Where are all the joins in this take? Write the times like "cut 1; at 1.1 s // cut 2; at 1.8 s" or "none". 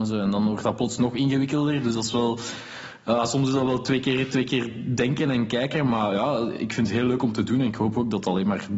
none